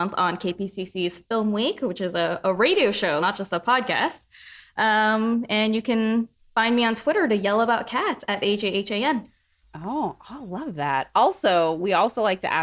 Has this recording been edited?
yes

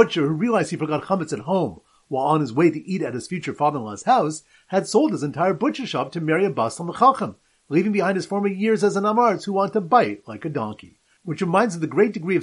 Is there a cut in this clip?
no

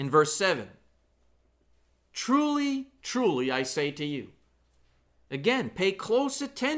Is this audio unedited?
yes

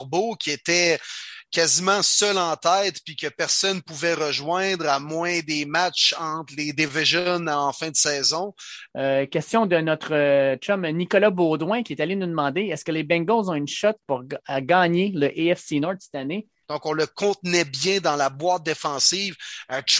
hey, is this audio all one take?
no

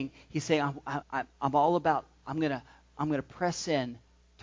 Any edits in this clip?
yes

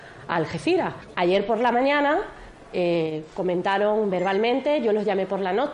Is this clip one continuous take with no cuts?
no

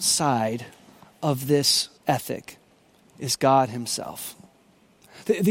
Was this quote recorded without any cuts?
no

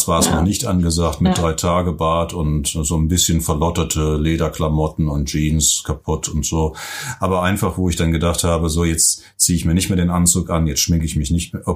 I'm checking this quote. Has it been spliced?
no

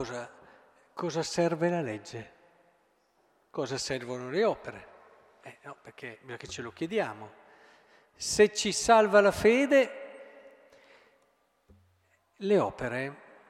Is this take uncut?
yes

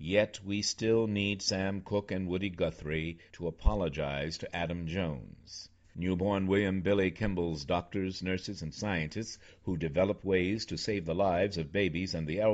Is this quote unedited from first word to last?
no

